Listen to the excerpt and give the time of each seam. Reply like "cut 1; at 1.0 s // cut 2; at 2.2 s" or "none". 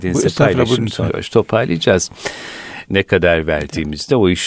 cut 1; at 1.1 s // cut 2; at 2.8 s